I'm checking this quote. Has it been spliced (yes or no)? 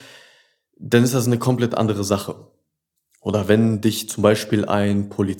no